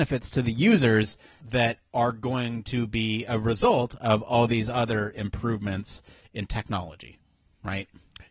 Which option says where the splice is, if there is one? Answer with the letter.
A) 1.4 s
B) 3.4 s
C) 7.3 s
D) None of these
A